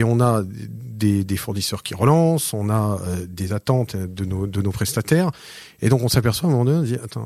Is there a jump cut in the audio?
no; 0 cuts

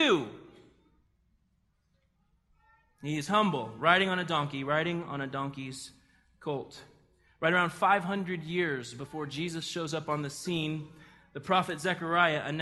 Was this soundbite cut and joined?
no; 0 cuts

